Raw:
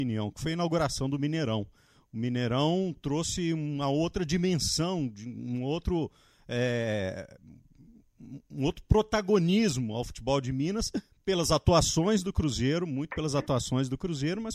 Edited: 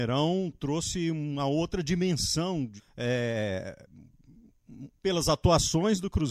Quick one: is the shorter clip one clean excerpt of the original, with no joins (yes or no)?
no